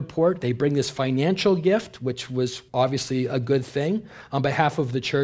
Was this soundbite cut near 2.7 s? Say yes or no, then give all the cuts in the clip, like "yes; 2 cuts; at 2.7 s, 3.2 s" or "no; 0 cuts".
yes; 1 cut; at 2.7 s